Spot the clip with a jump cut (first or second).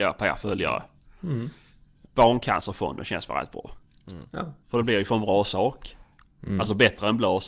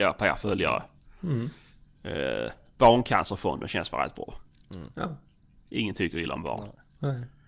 first